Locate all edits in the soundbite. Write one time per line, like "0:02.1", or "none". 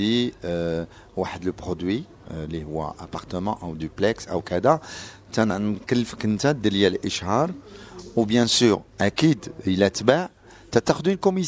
none